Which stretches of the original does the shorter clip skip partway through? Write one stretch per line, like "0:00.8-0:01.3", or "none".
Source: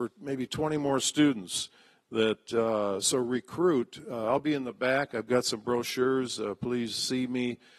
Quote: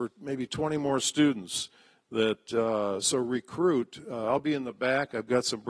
none